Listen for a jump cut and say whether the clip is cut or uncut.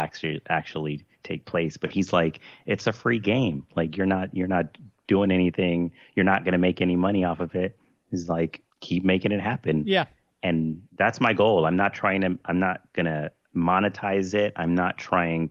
cut